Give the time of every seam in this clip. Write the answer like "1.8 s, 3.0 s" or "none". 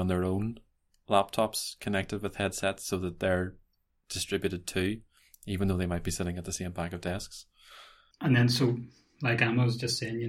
8.1 s